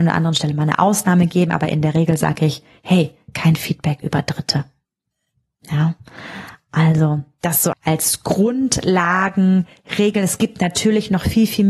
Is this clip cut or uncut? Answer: cut